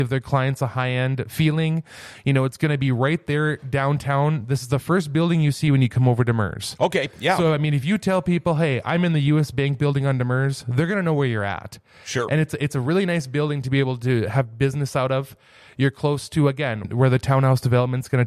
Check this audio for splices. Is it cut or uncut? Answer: cut